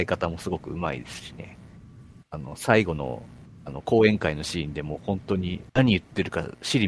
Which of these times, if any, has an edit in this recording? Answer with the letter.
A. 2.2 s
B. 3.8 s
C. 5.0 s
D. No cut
A